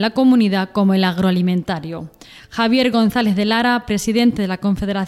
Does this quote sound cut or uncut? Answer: uncut